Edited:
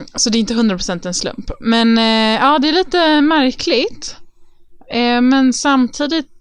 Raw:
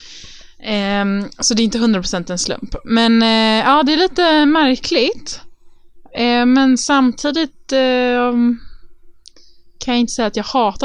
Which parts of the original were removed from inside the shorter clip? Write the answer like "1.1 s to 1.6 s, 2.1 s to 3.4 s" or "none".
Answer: none

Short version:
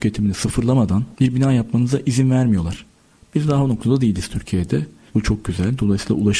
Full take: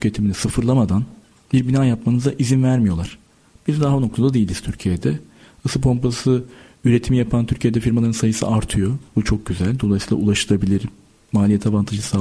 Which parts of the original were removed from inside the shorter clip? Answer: 1.1 s to 1.5 s, 5.4 s to 9.1 s

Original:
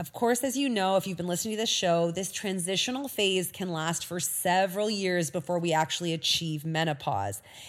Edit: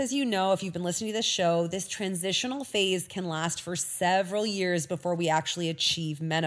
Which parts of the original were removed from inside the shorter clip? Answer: none

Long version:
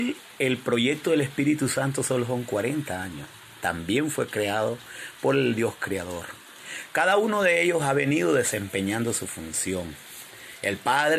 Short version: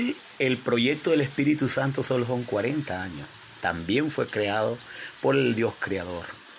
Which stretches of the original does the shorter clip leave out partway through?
none

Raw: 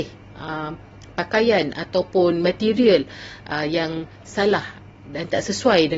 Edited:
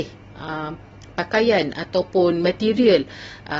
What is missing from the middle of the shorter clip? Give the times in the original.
none

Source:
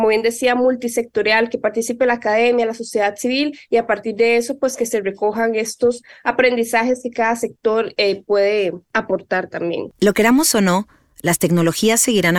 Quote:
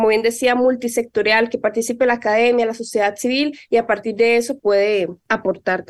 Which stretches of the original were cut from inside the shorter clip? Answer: 4.6 s to 8.2 s

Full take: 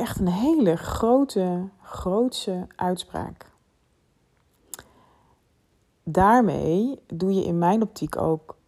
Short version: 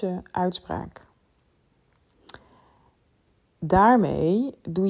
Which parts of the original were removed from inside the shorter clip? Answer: none

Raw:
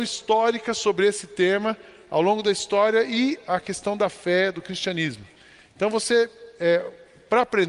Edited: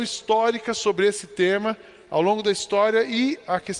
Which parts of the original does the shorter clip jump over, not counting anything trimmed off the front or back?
none

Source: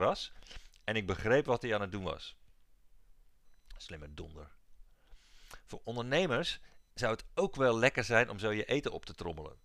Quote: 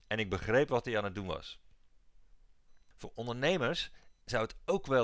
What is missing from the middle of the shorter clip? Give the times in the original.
3.7 s to 5.6 s

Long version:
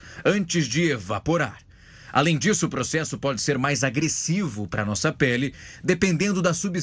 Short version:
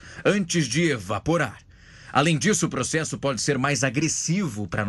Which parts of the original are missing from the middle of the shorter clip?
none

